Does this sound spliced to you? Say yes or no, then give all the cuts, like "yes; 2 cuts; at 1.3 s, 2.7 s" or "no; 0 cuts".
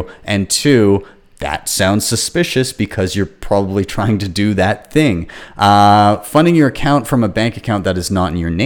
no; 0 cuts